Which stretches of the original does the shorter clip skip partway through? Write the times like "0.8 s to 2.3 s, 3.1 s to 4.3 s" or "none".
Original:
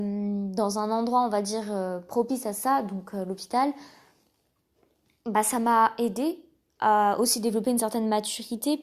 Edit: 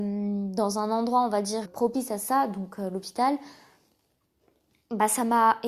1.6 s to 2.0 s